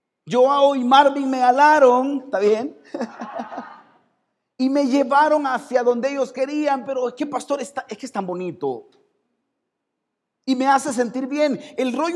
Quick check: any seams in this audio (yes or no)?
no